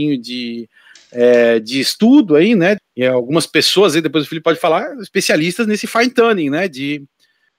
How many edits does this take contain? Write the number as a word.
one